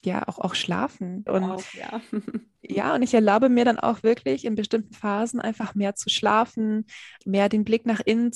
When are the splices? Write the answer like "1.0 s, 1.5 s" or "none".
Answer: 1.3 s, 7.2 s